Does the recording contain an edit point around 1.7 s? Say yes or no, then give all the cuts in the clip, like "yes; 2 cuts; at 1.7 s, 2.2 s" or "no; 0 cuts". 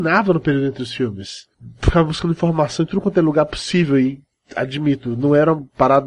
no; 0 cuts